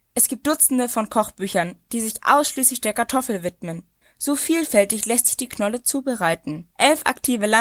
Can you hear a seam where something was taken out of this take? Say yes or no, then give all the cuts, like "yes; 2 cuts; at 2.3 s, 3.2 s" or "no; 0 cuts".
yes; 1 cut; at 6.7 s